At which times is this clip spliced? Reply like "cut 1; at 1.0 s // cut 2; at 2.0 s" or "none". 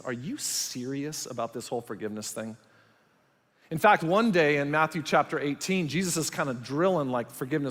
none